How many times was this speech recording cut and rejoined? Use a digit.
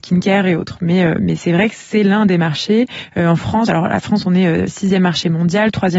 0